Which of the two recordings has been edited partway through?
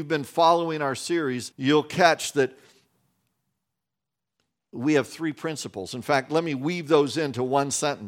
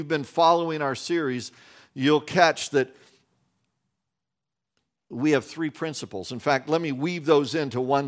first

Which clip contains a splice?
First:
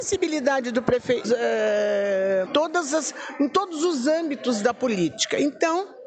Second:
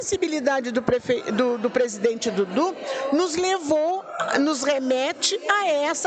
first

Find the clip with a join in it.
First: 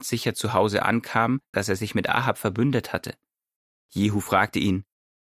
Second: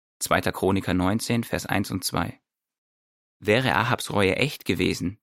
first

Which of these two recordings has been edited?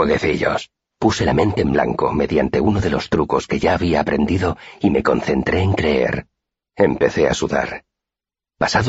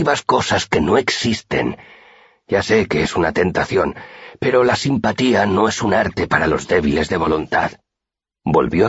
first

